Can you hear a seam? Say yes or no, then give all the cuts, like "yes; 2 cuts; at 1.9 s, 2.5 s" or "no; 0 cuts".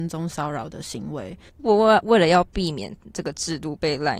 yes; 1 cut; at 1.5 s